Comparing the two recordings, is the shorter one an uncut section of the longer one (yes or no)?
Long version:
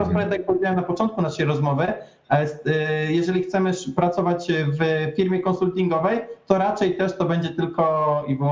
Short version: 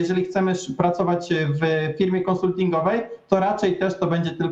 yes